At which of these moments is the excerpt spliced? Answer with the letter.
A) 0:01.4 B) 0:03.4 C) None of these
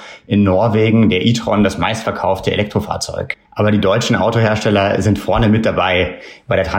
B